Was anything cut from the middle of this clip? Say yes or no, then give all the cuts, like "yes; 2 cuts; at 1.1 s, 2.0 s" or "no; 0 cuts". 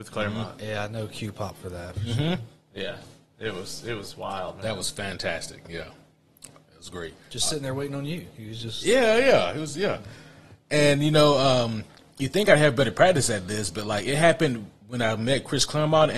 no; 0 cuts